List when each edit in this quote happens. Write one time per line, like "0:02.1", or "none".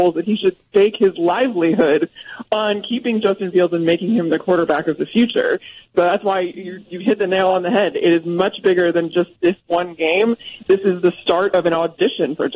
none